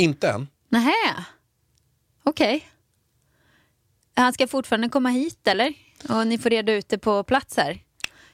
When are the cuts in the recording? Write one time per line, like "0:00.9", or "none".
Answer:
none